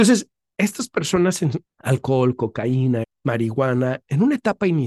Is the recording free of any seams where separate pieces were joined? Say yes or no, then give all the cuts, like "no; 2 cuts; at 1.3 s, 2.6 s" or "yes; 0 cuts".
no; 2 cuts; at 1.7 s, 3.0 s